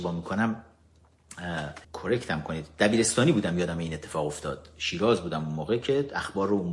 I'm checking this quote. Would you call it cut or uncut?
cut